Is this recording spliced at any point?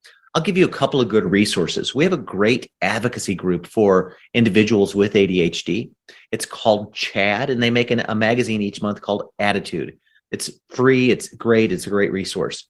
no; 0 cuts

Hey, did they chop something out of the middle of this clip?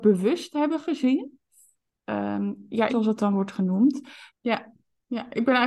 yes; 2 cuts; at 2.9 s, 4.3 s

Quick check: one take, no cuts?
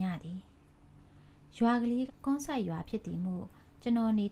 no; 1 cut; at 2.1 s

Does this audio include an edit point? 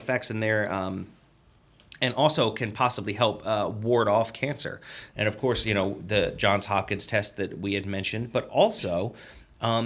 yes; 1 cut; at 5.1 s

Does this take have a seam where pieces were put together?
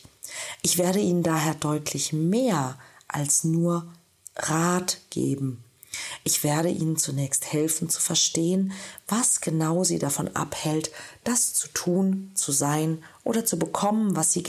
no; 0 cuts

